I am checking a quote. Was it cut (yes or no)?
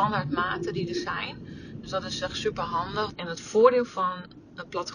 yes